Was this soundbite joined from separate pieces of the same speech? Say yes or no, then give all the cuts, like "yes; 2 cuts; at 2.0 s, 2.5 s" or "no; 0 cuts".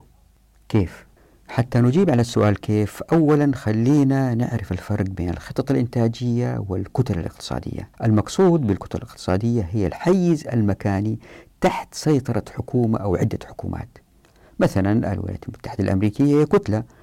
yes; 1 cut; at 7.9 s